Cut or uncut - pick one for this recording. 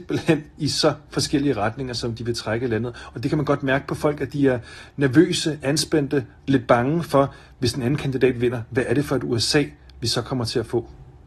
uncut